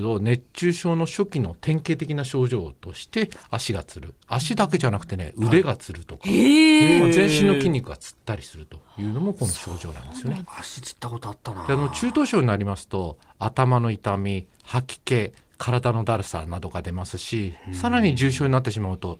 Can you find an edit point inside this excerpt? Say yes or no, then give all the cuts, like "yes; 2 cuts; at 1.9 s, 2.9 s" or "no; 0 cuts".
yes; 1 cut; at 10.4 s